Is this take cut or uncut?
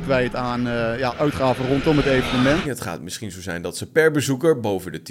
cut